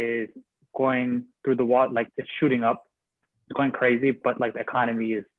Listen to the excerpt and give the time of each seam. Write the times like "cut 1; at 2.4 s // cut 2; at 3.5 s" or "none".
cut 1; at 2.1 s